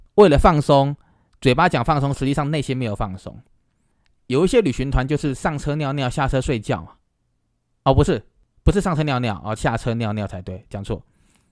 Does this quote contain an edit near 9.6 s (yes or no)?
yes